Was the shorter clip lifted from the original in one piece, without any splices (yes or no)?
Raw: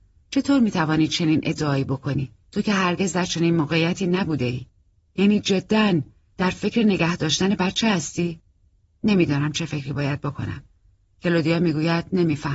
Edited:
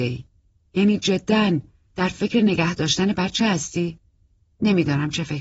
yes